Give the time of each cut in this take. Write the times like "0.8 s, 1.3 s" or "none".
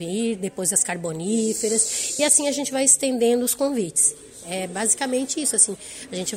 none